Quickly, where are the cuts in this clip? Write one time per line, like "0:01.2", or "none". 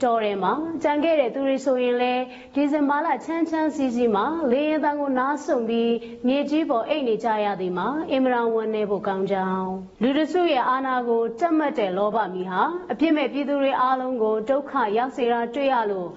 0:09.9